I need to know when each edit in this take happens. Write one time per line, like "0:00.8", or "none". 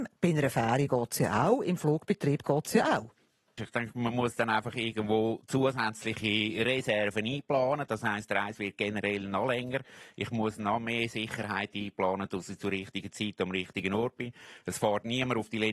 0:03.6